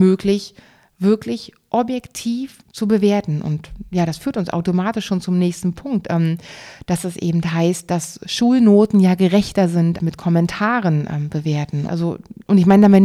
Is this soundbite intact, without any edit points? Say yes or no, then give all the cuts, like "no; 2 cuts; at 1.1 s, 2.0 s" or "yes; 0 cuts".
no; 3 cuts; at 2.6 s, 10.0 s, 11.9 s